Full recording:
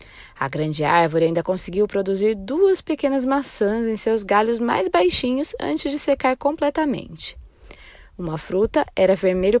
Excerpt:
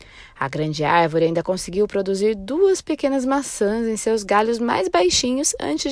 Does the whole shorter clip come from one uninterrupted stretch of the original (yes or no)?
yes